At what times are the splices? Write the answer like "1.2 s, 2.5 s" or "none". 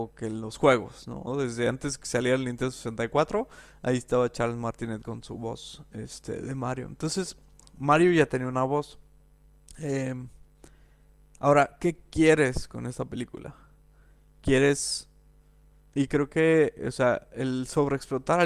1.3 s, 15.9 s